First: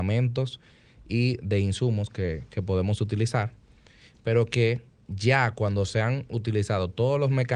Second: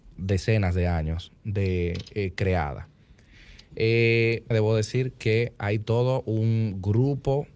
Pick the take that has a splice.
second; 1 cut; at 4.5 s

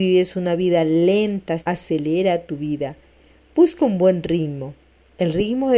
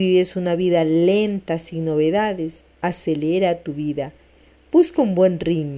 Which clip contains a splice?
first; 1 cut; at 1.6 s

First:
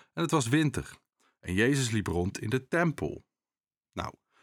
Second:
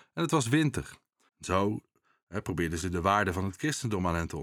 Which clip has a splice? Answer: second; 1 cut; at 1.3 s

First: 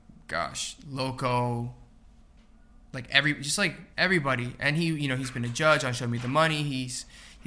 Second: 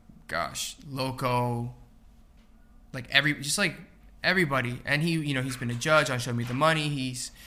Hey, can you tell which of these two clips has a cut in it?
first; 1 cut; at 3.9 s

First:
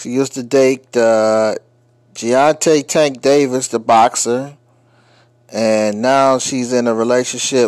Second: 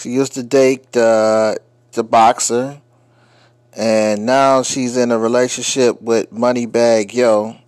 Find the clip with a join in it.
second; 1 cut; at 1.9 s

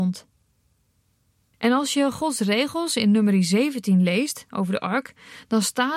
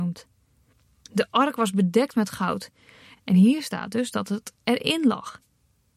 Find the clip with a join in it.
second; 2 cuts; at 1.0 s, 3.1 s

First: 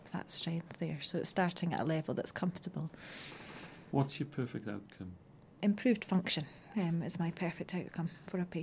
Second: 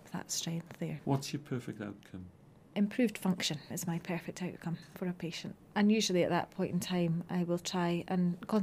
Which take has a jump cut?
second; 3 cuts; at 1.0 s, 3.7 s, 5.7 s

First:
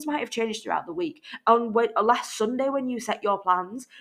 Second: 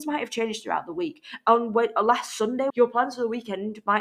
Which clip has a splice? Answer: second; 1 cut; at 2.7 s

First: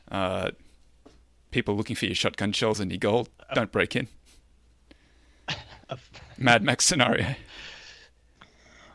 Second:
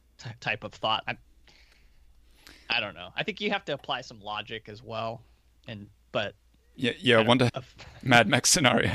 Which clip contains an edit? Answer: second; 2 cuts; at 1.1 s, 7.5 s

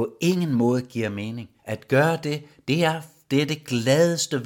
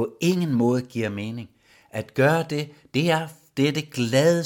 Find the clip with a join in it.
first; 1 cut; at 1.6 s

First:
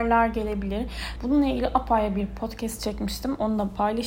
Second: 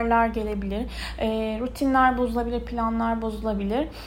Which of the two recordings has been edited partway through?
first; 1 cut; at 1.2 s

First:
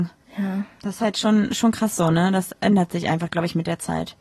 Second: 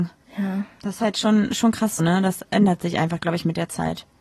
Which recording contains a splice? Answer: second; 1 cut; at 2.0 s

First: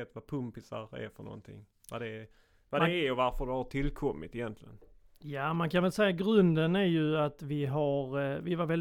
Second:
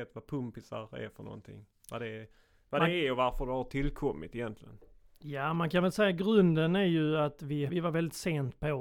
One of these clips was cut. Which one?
second; 1 cut; at 7.7 s

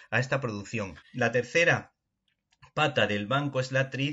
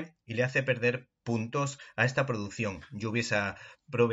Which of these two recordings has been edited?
first; 1 cut; at 1.0 s

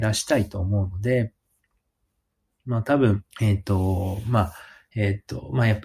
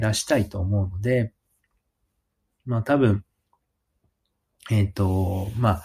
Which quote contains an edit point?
first; 2 cuts; at 3.3 s, 4.9 s

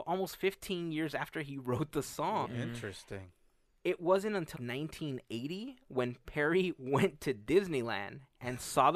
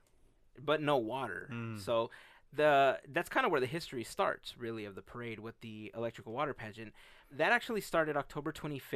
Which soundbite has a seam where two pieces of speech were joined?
first; 2 cuts; at 2.4 s, 4.5 s

